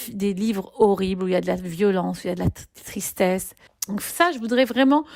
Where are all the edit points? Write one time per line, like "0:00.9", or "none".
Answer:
0:03.7